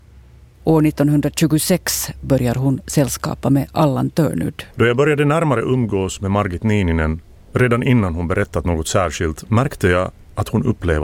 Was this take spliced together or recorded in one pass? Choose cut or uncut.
cut